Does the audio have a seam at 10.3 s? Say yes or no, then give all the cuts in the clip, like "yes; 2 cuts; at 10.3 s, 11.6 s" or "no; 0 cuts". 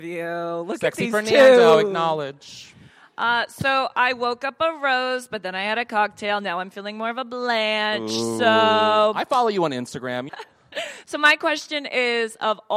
yes; 1 cut; at 10.3 s